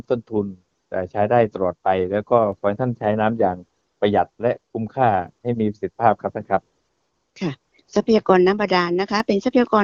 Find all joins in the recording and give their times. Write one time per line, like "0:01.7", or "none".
none